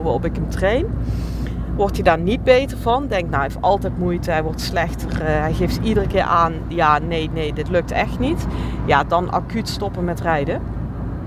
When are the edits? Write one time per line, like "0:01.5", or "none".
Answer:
none